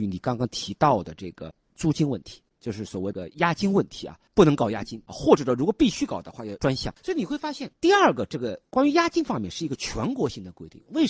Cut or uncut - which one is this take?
uncut